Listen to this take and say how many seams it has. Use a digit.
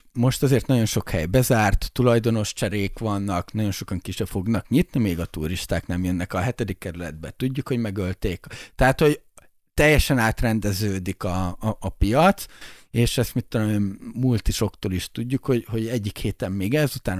0